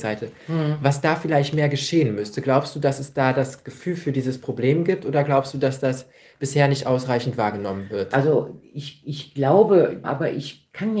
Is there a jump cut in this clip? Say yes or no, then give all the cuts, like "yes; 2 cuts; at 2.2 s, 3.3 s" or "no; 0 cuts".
yes; 1 cut; at 10.0 s